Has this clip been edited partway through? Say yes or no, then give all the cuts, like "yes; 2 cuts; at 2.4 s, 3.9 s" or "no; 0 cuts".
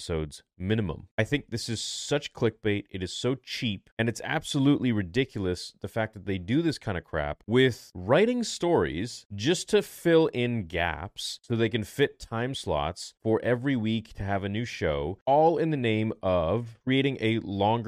no; 0 cuts